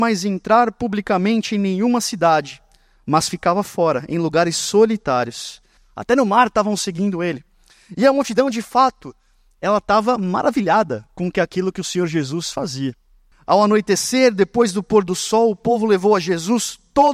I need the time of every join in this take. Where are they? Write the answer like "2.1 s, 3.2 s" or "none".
5.8 s, 13.3 s